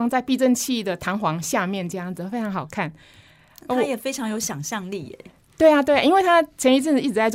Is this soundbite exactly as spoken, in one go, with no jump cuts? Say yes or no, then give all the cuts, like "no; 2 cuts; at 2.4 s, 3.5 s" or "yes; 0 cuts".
yes; 0 cuts